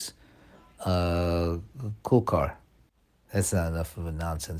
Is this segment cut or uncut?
uncut